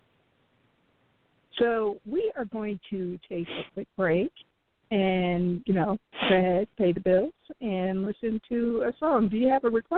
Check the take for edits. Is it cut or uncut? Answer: cut